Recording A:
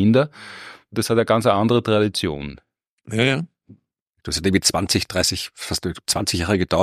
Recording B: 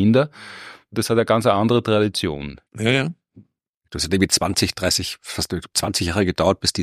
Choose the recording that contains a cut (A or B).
B